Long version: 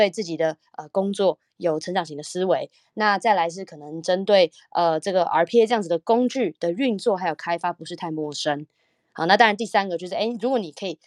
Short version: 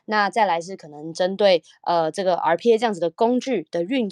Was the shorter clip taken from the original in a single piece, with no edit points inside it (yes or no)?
yes